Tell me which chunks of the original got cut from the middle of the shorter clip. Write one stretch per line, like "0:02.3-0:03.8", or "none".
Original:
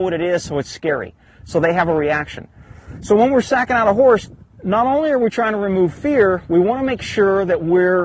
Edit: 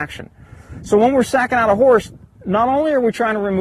none